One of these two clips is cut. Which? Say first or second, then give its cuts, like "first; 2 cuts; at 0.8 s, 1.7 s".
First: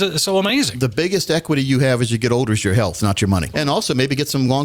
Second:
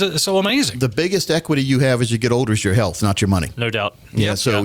first; 1 cut; at 3.5 s